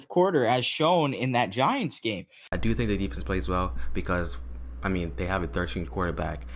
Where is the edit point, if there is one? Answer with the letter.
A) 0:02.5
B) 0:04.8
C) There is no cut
A